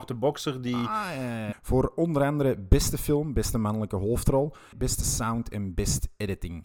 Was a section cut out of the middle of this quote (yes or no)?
yes